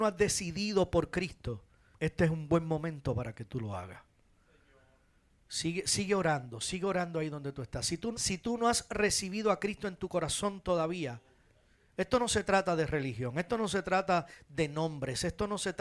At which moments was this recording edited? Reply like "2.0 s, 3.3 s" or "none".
8.1 s